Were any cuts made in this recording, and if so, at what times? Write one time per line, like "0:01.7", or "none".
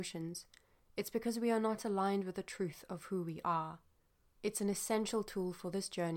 0:04.4